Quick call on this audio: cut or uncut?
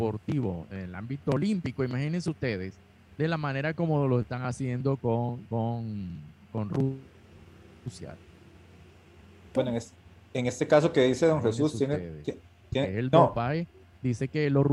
cut